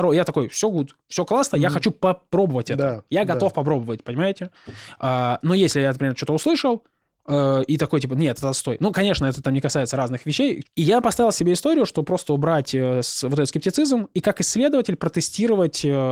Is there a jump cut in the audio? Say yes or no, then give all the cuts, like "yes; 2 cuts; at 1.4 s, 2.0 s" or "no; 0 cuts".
yes; 1 cut; at 10.6 s